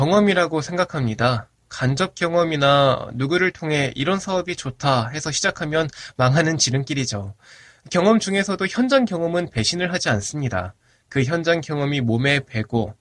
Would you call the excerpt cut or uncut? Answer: uncut